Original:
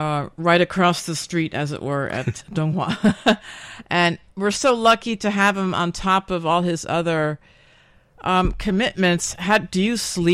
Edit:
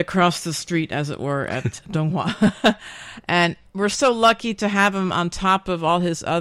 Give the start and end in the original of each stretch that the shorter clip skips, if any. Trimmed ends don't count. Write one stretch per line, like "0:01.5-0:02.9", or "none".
none